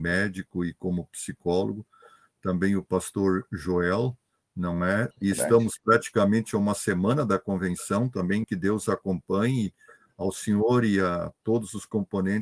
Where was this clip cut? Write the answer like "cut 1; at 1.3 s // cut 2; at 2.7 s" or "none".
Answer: cut 1; at 5.1 s // cut 2; at 8.4 s